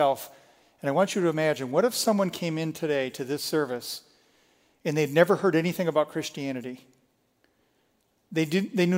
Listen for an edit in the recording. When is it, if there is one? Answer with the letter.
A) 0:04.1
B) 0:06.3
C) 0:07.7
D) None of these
D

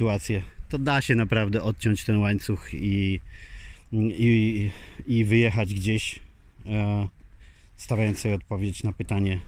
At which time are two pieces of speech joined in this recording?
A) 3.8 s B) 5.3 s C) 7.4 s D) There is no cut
D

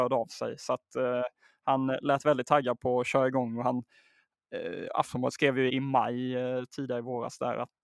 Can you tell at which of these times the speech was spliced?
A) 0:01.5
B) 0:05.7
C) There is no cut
B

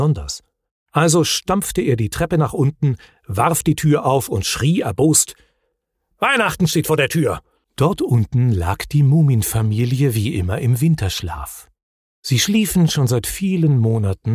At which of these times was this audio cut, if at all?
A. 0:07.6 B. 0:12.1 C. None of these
A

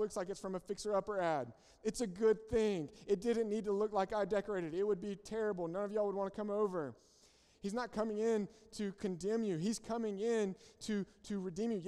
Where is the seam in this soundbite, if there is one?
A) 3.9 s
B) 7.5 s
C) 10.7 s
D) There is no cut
B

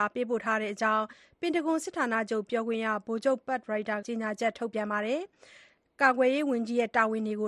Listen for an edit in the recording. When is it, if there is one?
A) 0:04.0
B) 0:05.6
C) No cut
A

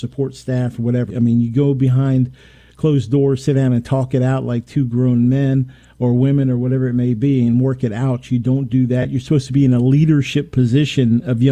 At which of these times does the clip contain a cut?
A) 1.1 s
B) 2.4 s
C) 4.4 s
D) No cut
A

